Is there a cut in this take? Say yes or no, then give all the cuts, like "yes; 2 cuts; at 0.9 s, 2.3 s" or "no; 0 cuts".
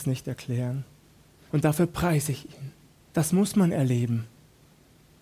yes; 2 cuts; at 1.5 s, 3.1 s